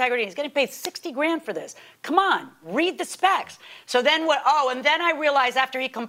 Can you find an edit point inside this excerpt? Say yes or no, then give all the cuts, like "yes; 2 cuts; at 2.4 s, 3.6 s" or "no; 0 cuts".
no; 0 cuts